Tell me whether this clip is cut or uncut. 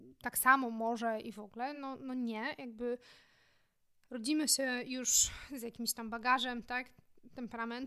uncut